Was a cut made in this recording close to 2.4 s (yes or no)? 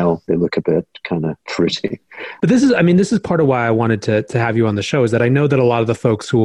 yes